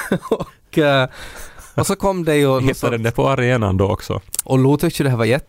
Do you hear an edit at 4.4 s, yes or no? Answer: yes